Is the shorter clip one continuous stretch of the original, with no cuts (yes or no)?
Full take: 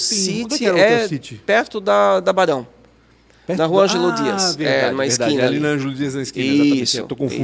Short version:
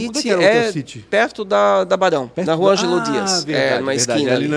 no